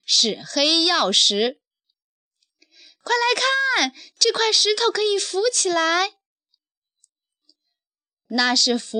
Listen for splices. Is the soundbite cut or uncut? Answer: uncut